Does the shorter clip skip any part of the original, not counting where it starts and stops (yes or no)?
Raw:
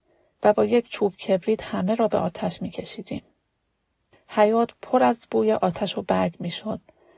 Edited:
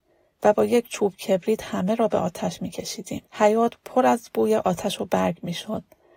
yes